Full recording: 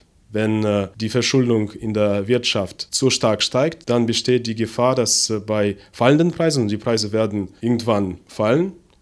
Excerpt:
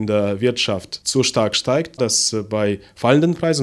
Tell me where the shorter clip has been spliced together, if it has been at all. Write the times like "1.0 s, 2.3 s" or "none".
2.0 s